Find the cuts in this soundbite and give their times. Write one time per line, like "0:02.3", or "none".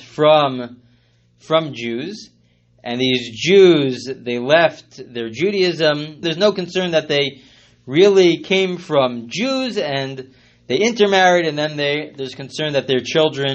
0:06.2